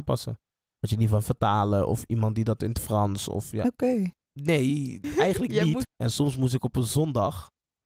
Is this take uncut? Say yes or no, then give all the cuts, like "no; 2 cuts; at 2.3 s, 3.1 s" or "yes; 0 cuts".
no; 2 cuts; at 4.3 s, 5.8 s